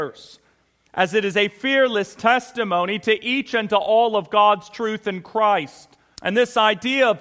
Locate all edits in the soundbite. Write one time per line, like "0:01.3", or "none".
0:06.2

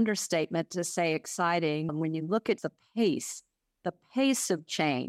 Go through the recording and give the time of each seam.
0:01.9

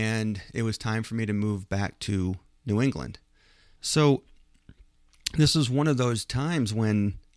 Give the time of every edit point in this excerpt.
0:03.8

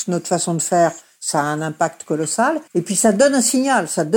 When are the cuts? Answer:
0:02.7

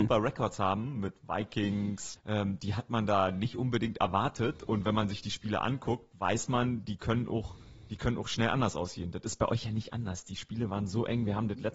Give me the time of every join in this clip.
0:02.2

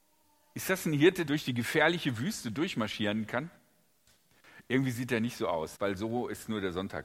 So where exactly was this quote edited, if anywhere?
0:01.3
0:05.8

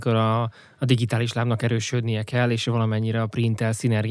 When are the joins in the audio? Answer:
none

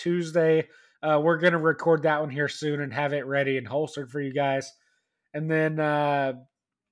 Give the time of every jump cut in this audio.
none

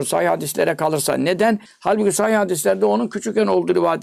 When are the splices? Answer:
0:01.7

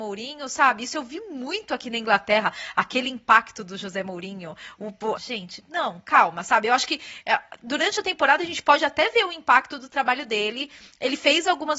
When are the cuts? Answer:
0:05.2

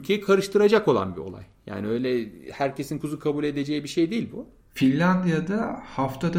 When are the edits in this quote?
0:03.0
0:04.6

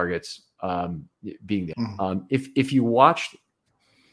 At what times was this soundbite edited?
0:01.7

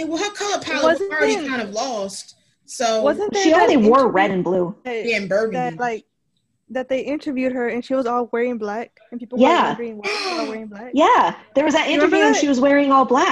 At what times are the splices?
none

